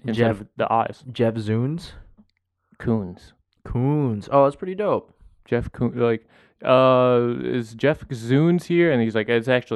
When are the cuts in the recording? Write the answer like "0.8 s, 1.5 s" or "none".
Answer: none